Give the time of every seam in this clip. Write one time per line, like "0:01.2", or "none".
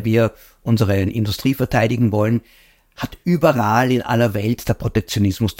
none